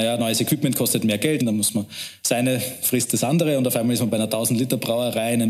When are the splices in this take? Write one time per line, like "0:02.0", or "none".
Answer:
0:01.4